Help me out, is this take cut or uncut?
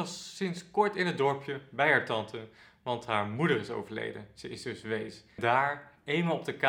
uncut